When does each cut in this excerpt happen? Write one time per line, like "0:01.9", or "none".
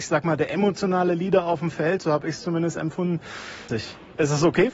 0:03.7